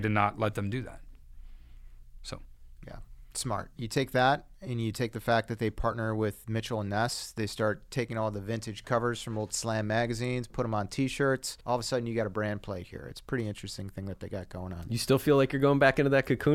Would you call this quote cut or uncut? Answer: cut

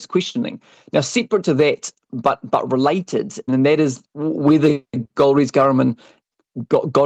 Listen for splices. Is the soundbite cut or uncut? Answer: cut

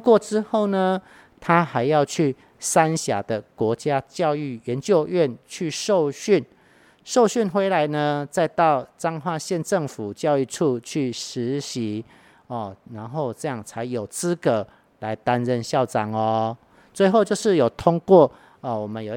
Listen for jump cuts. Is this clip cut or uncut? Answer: uncut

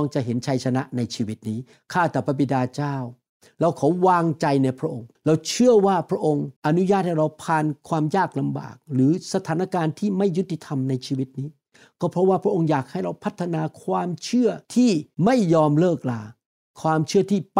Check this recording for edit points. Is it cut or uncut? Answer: cut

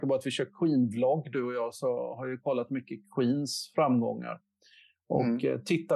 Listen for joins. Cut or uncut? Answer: uncut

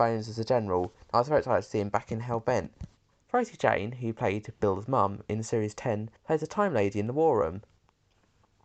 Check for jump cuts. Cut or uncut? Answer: cut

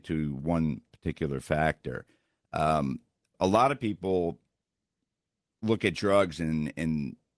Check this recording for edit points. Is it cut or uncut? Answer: cut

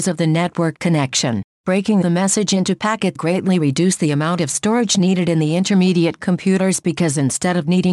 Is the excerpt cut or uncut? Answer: cut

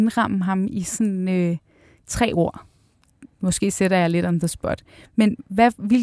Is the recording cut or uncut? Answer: uncut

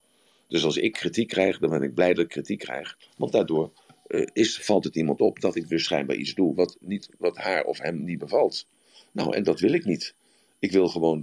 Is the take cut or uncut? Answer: uncut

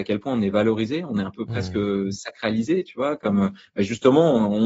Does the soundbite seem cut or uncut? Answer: uncut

